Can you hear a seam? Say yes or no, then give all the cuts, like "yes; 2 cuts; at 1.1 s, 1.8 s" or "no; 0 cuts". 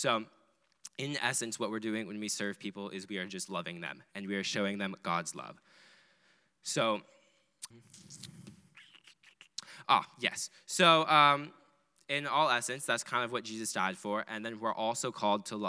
yes; 1 cut; at 7.7 s